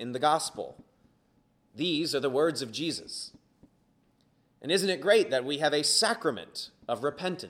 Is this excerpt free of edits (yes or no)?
yes